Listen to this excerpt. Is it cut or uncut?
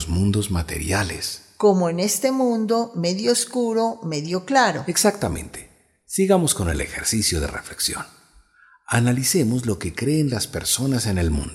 uncut